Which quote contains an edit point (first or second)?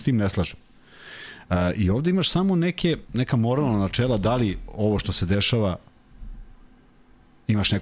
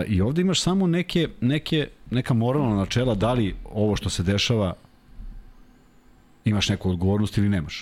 first